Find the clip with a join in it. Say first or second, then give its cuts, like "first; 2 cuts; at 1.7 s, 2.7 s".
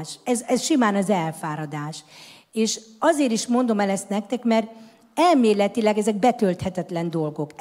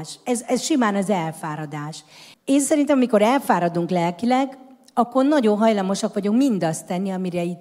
second; 1 cut; at 2.3 s